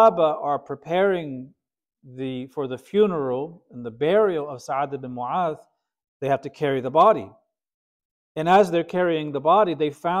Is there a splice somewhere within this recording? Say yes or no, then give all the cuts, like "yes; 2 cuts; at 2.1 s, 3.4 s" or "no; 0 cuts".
no; 0 cuts